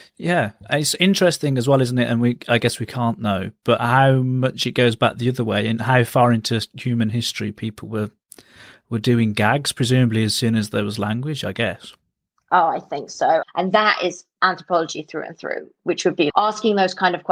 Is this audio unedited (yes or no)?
no